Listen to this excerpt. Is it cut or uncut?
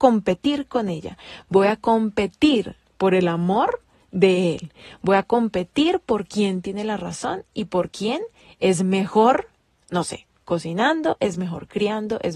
uncut